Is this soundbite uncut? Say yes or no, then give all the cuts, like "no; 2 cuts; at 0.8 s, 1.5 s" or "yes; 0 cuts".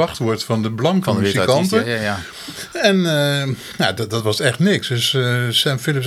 yes; 0 cuts